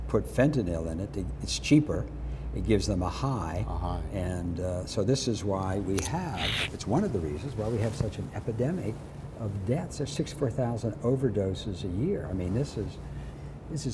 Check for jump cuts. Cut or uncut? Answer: cut